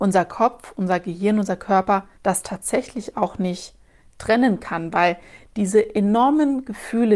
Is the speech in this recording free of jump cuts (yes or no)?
no